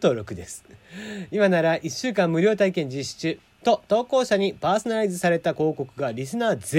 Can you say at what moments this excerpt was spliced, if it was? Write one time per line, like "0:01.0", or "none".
0:03.6